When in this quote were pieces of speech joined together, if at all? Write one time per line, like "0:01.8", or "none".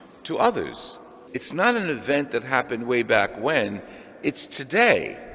0:01.3

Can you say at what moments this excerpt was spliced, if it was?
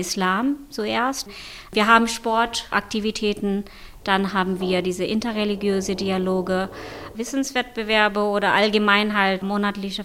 0:07.1

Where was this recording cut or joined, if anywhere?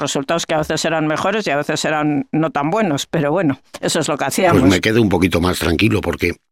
none

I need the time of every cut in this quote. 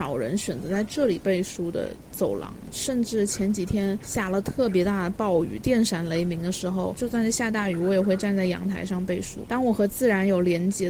0:06.9

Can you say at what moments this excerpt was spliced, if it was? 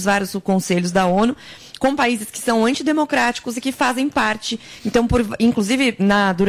none

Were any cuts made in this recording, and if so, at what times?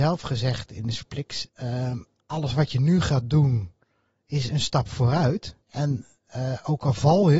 0:01.5
0:05.6

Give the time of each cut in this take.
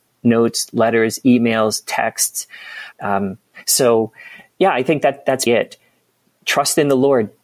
0:02.9
0:05.5

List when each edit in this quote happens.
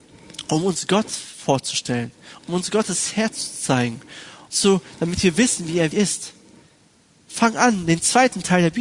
0:04.5
0:05.9

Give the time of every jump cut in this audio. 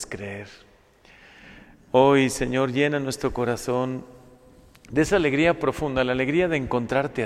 none

